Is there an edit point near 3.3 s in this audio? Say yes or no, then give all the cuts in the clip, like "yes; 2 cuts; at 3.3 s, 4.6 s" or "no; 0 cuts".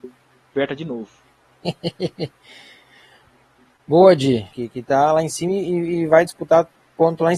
no; 1 cut; at 4.5 s